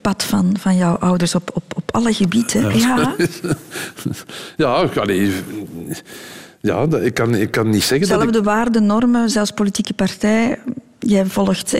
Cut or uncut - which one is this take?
cut